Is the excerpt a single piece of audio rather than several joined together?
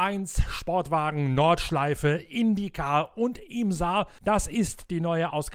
yes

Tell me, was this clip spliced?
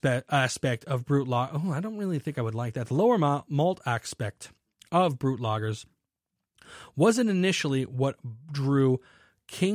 no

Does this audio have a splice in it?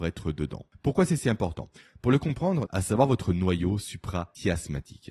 yes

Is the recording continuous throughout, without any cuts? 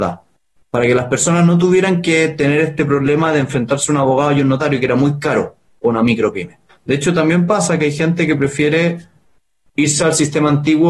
no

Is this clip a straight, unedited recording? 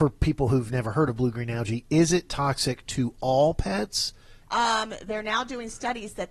no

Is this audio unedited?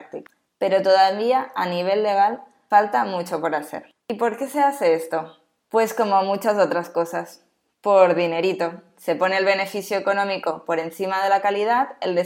yes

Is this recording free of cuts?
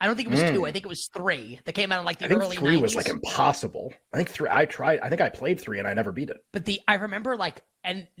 no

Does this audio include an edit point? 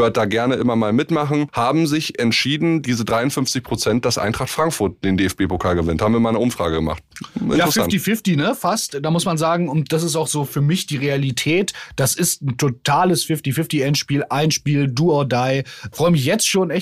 no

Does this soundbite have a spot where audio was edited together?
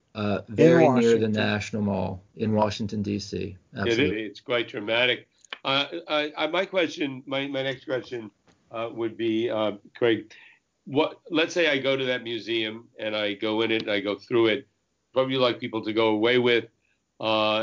yes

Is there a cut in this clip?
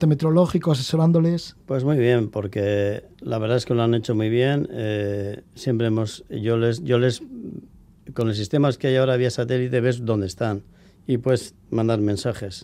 no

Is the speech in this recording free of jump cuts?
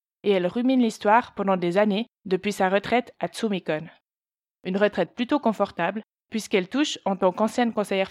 no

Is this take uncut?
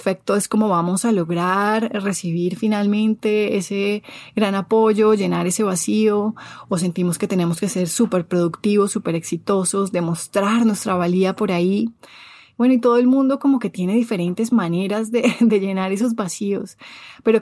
yes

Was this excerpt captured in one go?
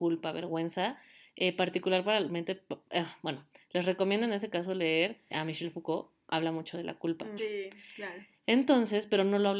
no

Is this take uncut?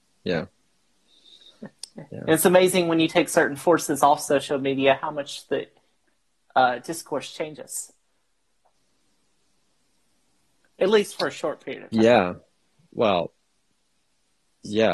yes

